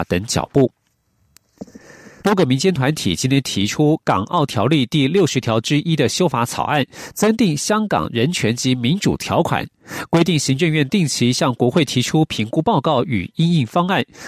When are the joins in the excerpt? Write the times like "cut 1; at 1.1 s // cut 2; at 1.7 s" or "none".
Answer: cut 1; at 2.2 s